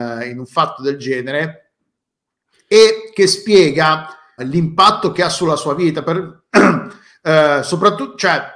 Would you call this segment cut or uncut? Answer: cut